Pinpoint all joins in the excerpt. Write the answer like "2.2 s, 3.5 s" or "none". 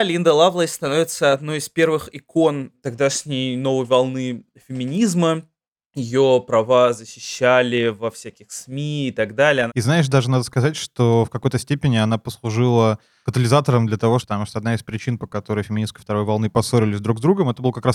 9.7 s, 14.2 s